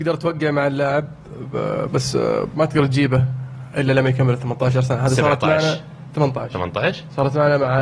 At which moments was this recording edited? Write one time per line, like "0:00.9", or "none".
none